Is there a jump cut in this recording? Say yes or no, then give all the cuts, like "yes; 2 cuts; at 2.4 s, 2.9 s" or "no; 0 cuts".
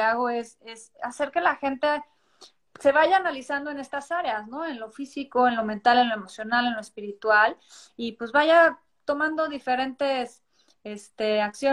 yes; 1 cut; at 2.7 s